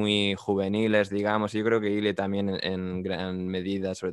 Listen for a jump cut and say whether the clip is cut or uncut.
uncut